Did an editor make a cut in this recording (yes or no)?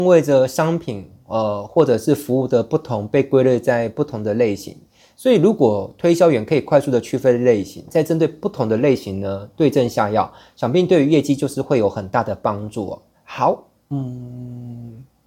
yes